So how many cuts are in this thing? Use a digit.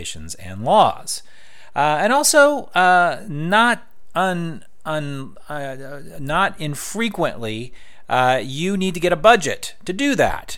0